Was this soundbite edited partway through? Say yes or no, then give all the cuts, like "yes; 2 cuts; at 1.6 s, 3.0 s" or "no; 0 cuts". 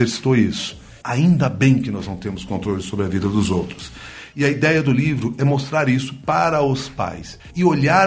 yes; 1 cut; at 1.0 s